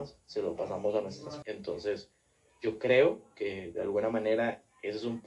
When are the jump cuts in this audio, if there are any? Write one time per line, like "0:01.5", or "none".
0:01.4

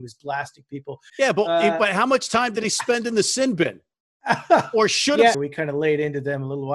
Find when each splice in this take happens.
0:01.1
0:05.3

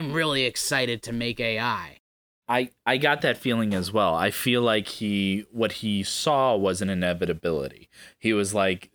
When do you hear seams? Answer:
none

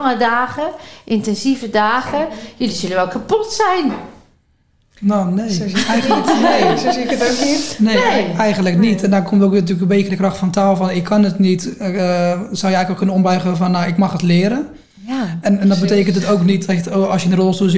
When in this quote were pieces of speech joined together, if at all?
none

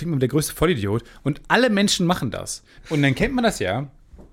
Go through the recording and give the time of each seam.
0:02.8

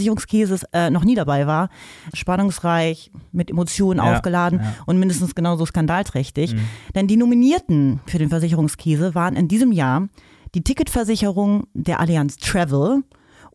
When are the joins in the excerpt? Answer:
0:02.1

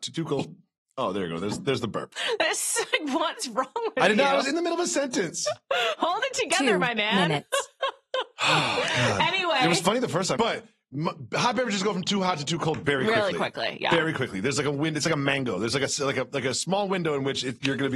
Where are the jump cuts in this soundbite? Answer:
0:10.4

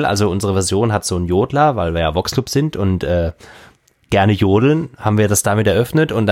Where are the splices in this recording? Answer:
none

